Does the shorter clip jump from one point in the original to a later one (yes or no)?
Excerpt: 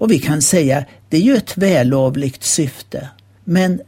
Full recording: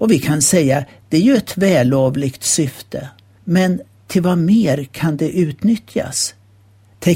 no